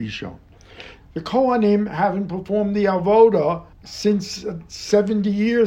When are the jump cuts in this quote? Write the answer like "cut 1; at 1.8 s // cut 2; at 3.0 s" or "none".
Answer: cut 1; at 1.0 s // cut 2; at 3.7 s